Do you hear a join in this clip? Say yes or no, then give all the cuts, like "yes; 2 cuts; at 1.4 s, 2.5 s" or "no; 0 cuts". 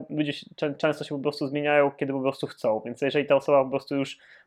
no; 0 cuts